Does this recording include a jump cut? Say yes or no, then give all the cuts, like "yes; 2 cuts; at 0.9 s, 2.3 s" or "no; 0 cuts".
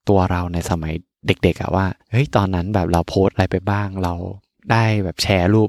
yes; 1 cut; at 2.0 s